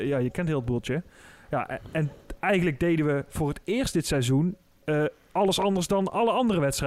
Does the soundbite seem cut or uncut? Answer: uncut